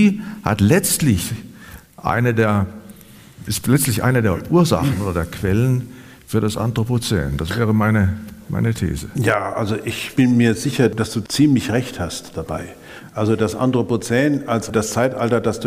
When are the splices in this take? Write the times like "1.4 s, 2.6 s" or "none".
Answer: none